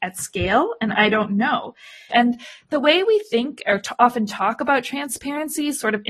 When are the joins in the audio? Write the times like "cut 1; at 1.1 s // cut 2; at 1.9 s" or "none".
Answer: cut 1; at 2.1 s